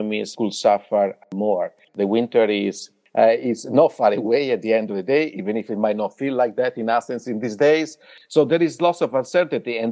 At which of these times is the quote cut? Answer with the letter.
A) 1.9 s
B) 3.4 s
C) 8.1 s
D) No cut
A